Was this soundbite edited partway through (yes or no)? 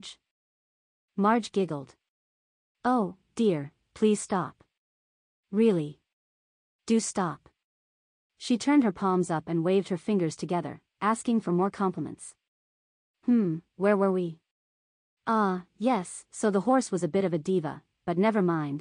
no